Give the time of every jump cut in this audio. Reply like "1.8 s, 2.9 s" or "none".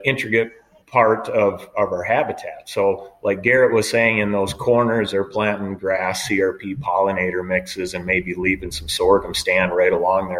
none